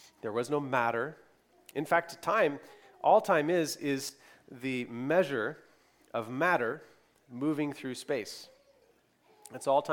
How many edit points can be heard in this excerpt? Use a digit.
0